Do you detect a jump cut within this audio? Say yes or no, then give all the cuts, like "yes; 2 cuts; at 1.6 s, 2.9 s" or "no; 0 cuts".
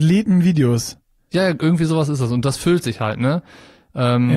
no; 0 cuts